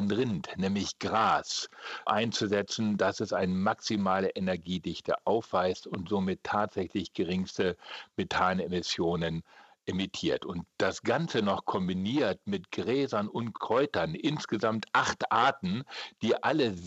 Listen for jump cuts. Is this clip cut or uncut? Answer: cut